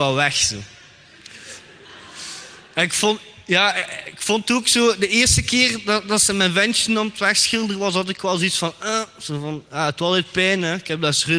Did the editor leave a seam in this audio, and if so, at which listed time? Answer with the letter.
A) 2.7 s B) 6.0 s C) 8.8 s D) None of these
D